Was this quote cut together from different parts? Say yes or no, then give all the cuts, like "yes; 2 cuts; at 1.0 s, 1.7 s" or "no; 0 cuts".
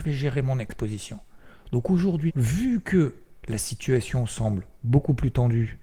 yes; 1 cut; at 2.3 s